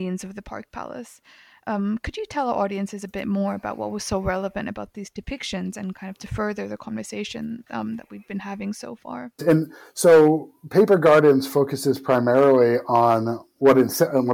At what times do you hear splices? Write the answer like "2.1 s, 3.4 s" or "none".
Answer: 9.4 s